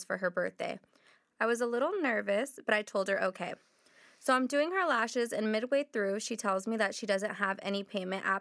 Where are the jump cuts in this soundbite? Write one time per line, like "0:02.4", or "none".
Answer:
none